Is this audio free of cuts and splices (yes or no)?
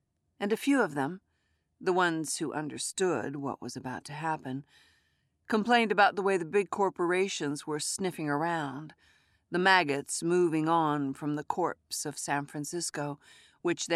yes